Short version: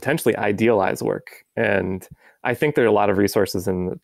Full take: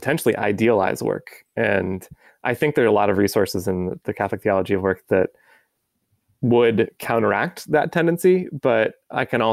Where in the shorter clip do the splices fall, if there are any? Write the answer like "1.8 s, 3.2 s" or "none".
none